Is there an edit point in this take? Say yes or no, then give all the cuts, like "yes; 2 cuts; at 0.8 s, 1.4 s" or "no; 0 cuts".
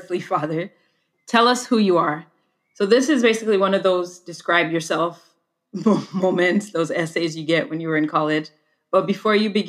no; 0 cuts